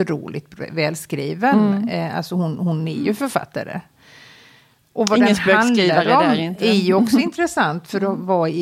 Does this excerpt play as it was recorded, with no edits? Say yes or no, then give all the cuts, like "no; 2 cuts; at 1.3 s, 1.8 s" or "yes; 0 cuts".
yes; 0 cuts